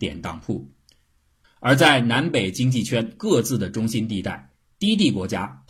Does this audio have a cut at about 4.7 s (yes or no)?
no